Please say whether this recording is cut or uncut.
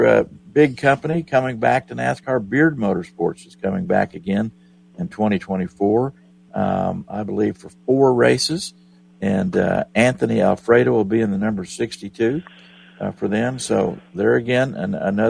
uncut